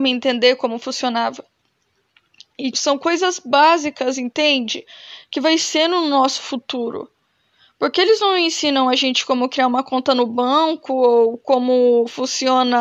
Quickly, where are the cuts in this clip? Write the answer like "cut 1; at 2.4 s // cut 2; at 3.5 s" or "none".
cut 1; at 2.7 s